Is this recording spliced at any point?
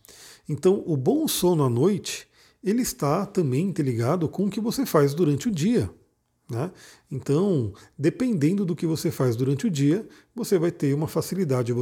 no; 0 cuts

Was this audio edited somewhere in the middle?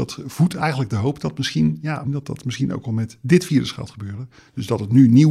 yes; 1 cut; at 2.0 s

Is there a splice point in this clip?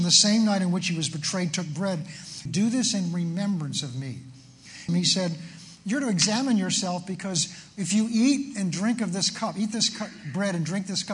yes; 2 cuts; at 2.5 s, 4.9 s

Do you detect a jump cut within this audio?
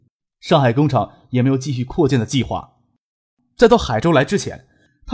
no; 0 cuts

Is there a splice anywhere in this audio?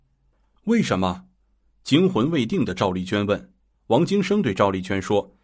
yes; 1 cut; at 3.7 s

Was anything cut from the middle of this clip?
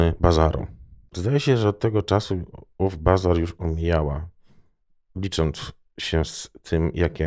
yes; 1 cut; at 1.1 s

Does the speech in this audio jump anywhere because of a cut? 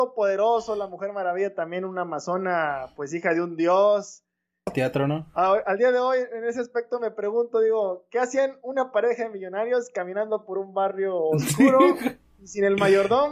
yes; 1 cut; at 4.7 s

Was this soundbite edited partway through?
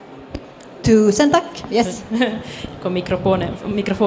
no; 0 cuts

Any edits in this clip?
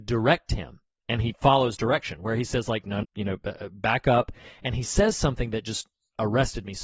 yes; 1 cut; at 3.0 s

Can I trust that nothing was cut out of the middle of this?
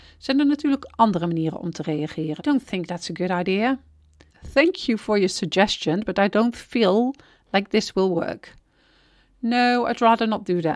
no; 1 cut; at 2.4 s

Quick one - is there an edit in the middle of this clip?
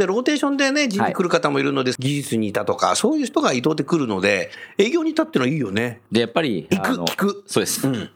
yes; 2 cuts; at 2.0 s, 6.1 s

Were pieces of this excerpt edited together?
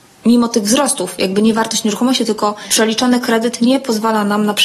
no; 0 cuts

